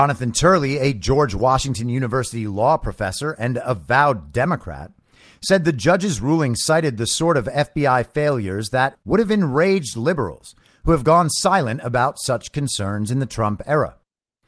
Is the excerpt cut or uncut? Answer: cut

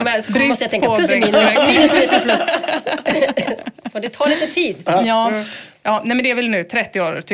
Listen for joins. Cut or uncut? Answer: cut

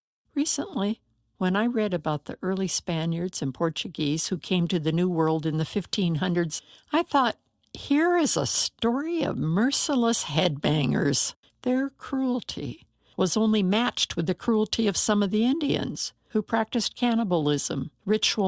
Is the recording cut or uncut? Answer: cut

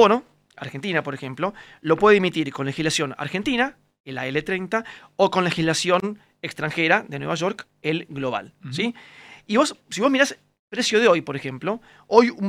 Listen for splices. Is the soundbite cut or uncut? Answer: uncut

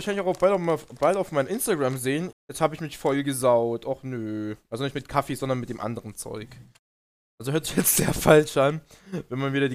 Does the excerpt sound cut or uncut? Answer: cut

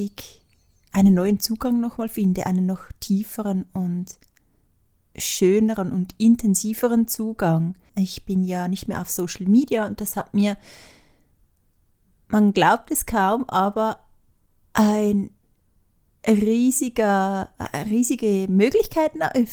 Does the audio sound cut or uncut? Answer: cut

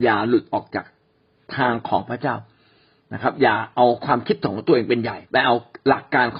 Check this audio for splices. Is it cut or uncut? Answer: cut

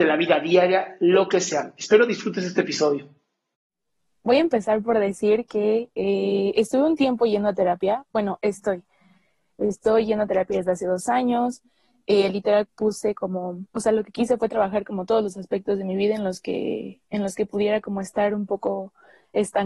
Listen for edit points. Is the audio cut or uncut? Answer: cut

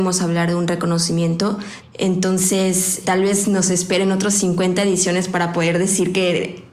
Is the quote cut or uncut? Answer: cut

